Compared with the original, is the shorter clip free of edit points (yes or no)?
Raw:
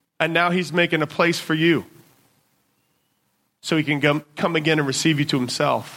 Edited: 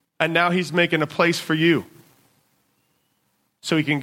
yes